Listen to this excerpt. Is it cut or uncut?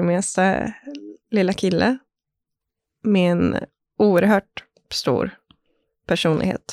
uncut